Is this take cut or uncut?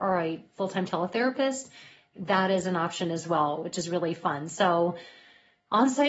uncut